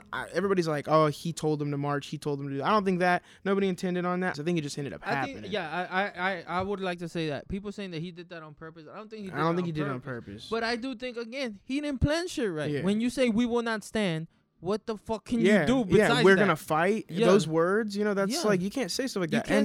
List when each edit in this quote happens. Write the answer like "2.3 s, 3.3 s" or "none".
4.3 s